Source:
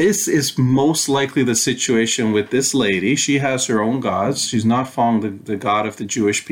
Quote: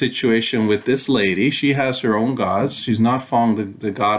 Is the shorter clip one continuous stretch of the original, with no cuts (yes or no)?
yes